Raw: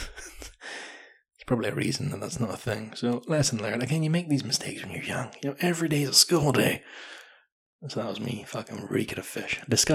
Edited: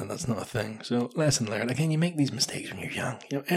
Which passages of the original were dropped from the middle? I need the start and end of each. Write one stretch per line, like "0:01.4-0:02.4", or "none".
none